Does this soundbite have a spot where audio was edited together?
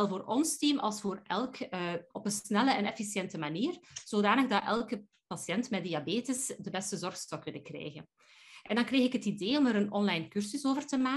yes; 1 cut; at 2.1 s

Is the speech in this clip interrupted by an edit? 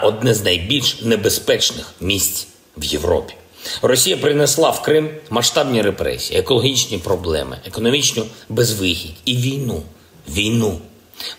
no; 0 cuts

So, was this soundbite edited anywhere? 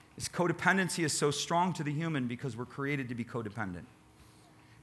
no; 0 cuts

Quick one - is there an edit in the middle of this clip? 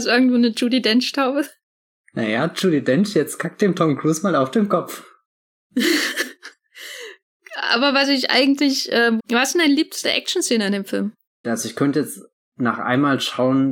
yes; 2 cuts; at 9.2 s, 11.4 s

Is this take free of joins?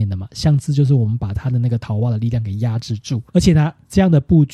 no; 1 cut; at 3.3 s

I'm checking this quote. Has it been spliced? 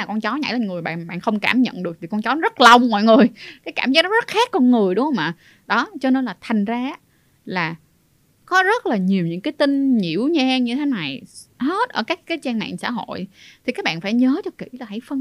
yes; 1 cut; at 11.5 s

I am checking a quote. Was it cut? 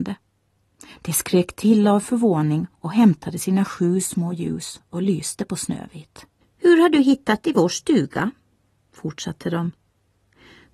yes; 1 cut; at 6.4 s

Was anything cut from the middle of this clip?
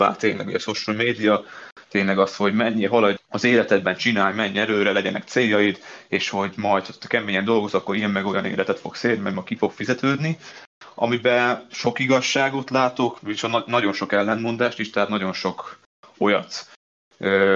yes; 2 cuts; at 3.2 s, 13.2 s

